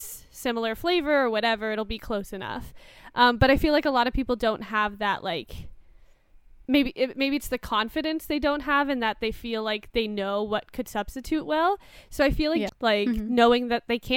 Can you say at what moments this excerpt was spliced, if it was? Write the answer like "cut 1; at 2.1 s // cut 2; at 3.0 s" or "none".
cut 1; at 12.7 s